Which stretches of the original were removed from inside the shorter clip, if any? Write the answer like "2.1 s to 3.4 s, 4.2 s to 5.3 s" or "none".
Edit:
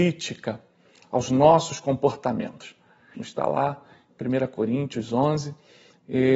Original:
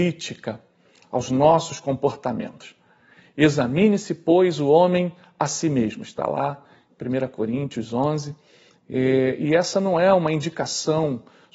3.1 s to 6.0 s